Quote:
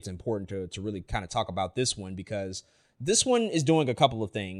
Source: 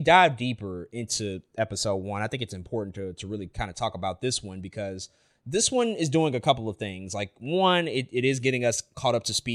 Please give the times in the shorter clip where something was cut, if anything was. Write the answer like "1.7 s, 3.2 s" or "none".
none